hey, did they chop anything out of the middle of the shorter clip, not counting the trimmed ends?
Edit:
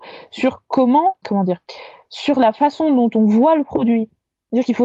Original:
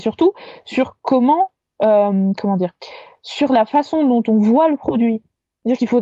yes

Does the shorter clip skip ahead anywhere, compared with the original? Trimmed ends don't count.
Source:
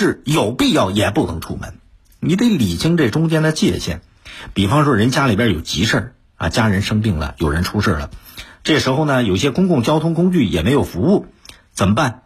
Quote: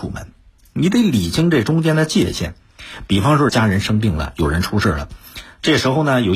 yes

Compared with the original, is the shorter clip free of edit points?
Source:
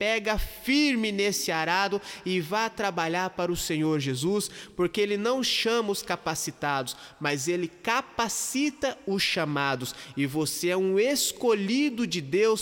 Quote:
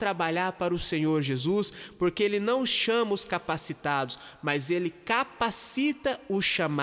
yes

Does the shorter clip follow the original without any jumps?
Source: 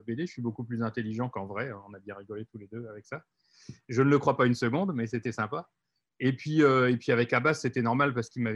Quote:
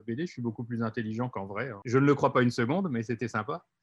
no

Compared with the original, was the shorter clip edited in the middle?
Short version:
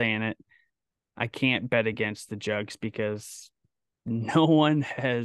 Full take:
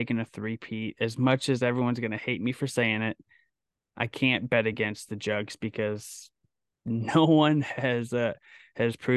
no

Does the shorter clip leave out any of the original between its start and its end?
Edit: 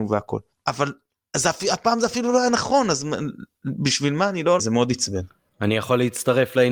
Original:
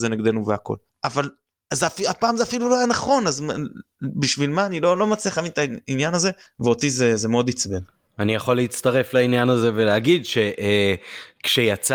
yes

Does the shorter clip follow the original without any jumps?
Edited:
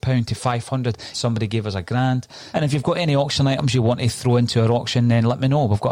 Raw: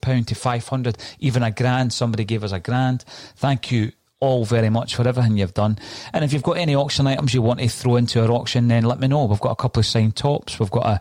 no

